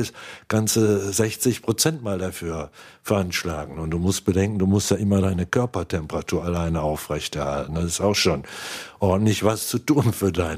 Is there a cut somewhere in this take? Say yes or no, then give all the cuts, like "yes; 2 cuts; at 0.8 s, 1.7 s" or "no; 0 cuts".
no; 0 cuts